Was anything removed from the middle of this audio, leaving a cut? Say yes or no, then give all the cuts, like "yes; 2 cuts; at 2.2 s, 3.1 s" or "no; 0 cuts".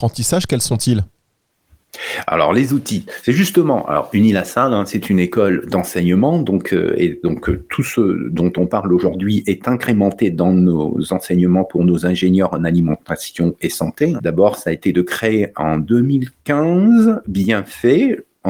yes; 2 cuts; at 14.2 s, 17.2 s